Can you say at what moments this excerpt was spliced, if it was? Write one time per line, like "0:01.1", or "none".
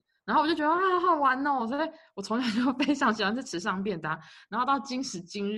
none